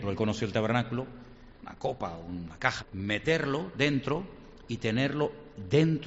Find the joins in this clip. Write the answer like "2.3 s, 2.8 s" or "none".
1.6 s, 2.8 s

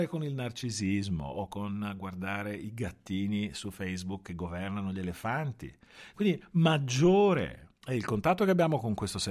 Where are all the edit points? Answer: 6.1 s, 7.8 s

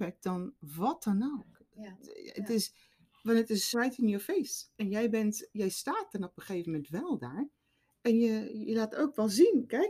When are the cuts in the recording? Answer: 3.7 s

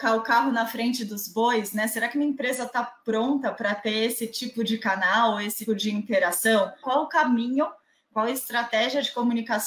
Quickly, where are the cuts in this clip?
5.7 s, 6.8 s

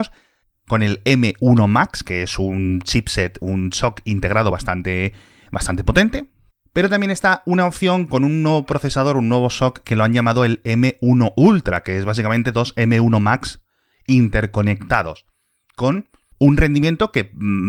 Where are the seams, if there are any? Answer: none

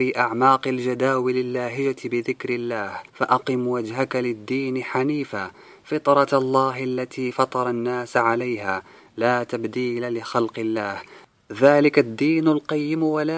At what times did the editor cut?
3.1 s

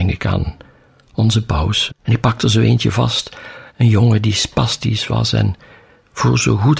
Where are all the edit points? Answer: 1.9 s, 3.7 s

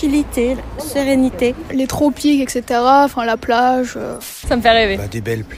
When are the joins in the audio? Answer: 4.4 s

